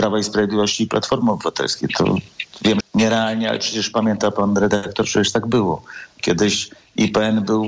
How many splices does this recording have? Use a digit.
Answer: 2